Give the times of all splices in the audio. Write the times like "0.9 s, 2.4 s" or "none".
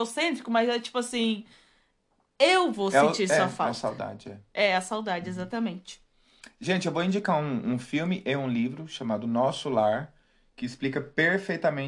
none